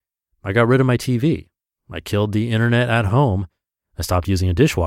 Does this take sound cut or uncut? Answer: uncut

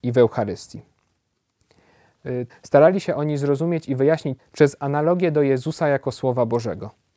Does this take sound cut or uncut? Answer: cut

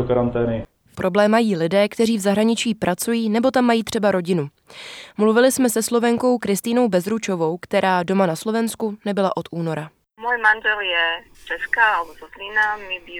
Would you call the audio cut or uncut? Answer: cut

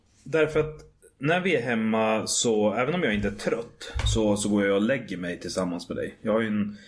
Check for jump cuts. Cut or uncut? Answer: uncut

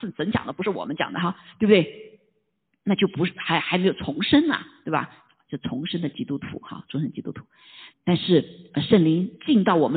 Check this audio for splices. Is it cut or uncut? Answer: cut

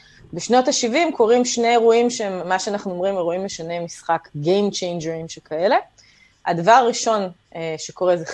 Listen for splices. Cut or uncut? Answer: uncut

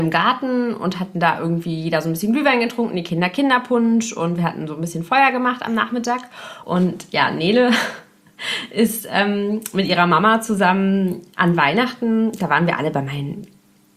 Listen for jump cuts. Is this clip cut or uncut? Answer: cut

